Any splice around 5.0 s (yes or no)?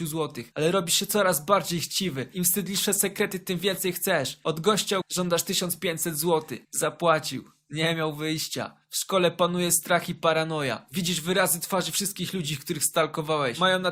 yes